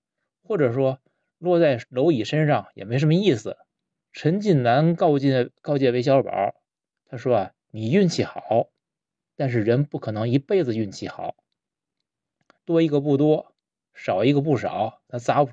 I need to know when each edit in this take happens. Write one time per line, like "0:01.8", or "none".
0:04.0
0:12.6